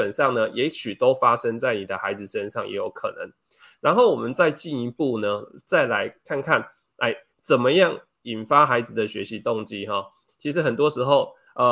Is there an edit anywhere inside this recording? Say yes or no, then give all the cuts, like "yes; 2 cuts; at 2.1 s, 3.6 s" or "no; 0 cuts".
yes; 1 cut; at 10.3 s